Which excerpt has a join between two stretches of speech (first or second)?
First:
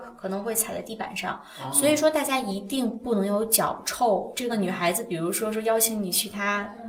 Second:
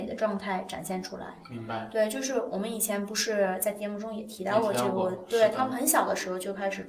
first